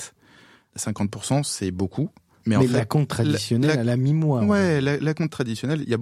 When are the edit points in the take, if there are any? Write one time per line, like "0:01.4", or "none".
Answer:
none